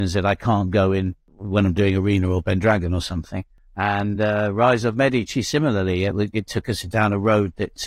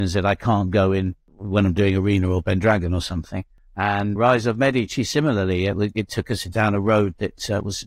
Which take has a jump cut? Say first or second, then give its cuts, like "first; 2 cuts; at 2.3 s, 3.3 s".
second; 1 cut; at 4.2 s